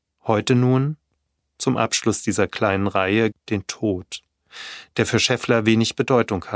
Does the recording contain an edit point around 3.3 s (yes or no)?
yes